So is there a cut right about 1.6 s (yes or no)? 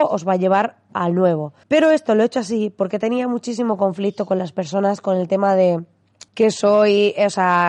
yes